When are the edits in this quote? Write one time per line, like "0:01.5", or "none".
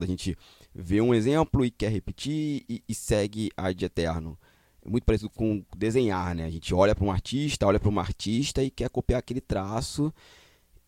none